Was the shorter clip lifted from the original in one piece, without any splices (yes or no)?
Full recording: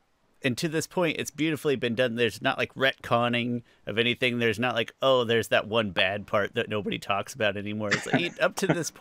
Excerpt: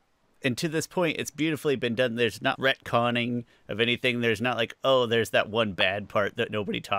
no